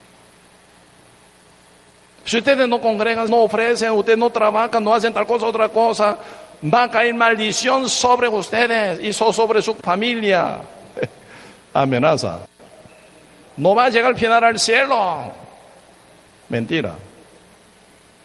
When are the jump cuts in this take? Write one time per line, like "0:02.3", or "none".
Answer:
0:03.3
0:13.4